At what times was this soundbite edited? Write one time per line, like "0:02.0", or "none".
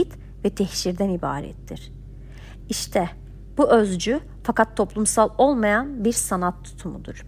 0:02.6